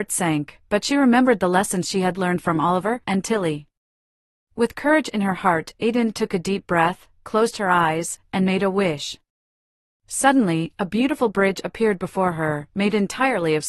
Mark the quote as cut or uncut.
cut